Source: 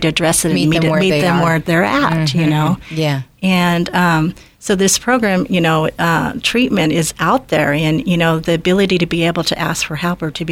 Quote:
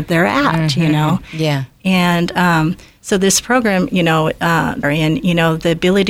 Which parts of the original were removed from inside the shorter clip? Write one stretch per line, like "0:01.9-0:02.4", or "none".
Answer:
0:06.4-0:07.7